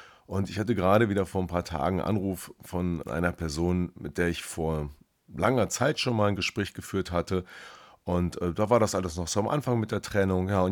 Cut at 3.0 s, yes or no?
yes